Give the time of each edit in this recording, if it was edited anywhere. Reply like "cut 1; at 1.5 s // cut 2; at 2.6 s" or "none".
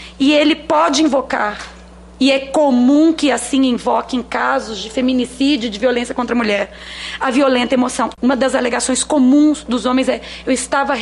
cut 1; at 8.2 s